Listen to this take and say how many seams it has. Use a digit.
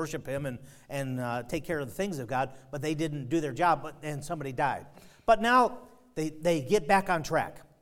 0